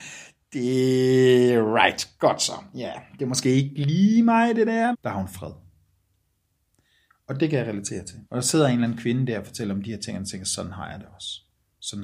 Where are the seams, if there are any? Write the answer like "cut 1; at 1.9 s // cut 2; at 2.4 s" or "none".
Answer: cut 1; at 4.9 s // cut 2; at 8.2 s

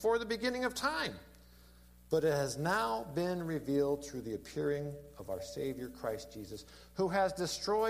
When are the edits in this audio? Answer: none

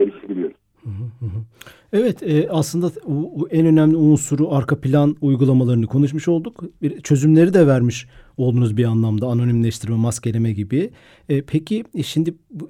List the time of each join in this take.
none

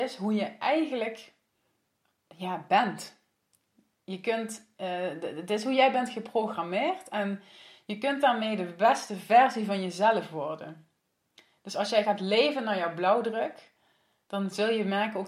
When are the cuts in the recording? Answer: none

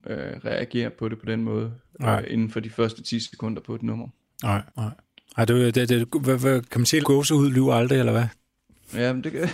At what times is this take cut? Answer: cut 1; at 4.7 s // cut 2; at 7.0 s

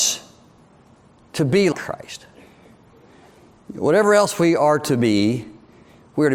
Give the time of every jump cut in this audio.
cut 1; at 1.7 s

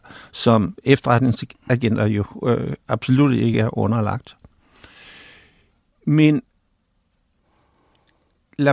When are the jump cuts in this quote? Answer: none

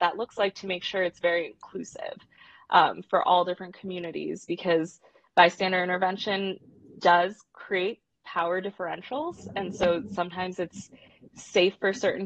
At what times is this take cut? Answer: none

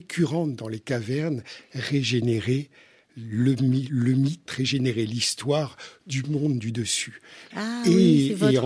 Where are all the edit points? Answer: cut 1; at 4.5 s // cut 2; at 7.5 s

